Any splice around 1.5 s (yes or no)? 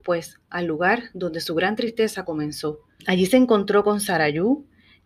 no